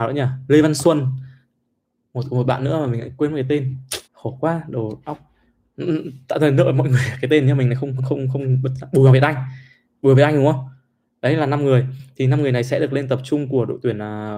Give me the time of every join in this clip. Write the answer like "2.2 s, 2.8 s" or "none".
4.1 s, 8.0 s